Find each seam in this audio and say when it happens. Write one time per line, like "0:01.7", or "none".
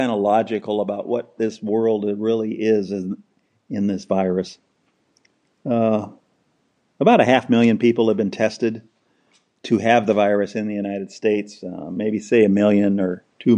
none